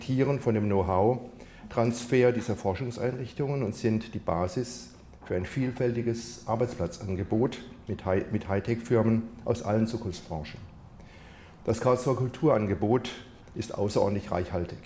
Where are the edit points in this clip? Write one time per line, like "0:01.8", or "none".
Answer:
none